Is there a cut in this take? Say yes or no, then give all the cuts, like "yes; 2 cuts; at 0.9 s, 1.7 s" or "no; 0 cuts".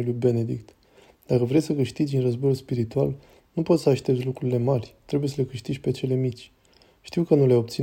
no; 0 cuts